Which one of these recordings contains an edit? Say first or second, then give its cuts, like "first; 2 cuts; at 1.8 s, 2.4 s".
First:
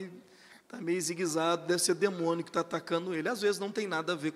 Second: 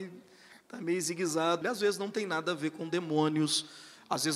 second; 1 cut; at 1.6 s